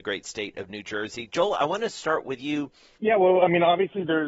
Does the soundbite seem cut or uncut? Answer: cut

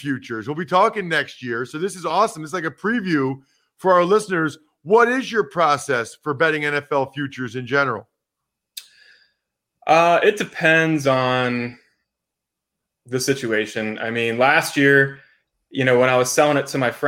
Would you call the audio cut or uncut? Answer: uncut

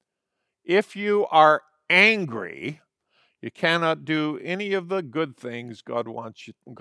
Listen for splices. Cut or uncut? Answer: uncut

